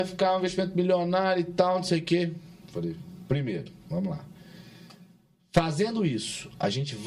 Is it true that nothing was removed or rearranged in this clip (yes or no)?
yes